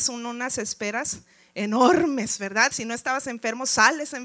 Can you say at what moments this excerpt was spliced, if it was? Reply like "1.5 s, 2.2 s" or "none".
none

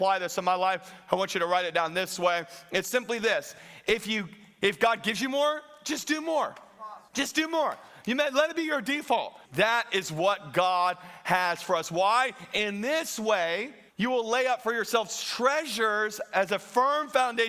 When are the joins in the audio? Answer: 7.1 s, 9.4 s, 13.9 s

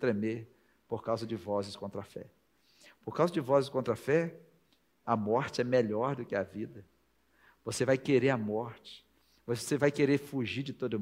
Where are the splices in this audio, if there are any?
5.0 s

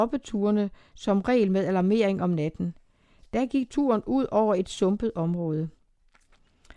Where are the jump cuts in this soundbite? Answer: 3.7 s

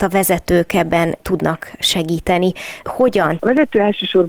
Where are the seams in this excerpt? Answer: 3.4 s

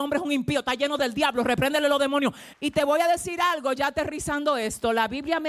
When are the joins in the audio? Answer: 2.5 s

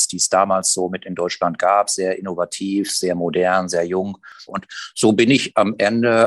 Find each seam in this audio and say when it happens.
4.5 s

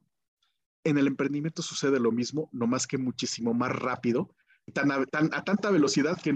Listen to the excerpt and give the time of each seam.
4.7 s

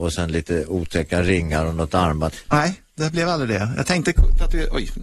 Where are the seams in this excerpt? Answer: 2.4 s

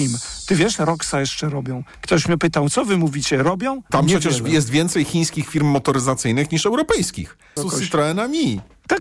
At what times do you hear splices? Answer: 3.9 s, 7.6 s

